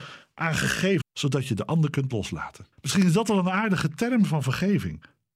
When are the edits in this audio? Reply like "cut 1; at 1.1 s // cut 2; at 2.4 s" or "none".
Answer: cut 1; at 1.0 s // cut 2; at 2.7 s